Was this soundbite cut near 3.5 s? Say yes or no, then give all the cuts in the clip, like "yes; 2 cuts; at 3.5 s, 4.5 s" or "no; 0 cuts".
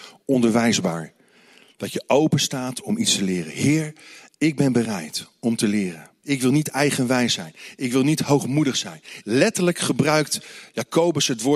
no; 2 cuts; at 6.2 s, 9.2 s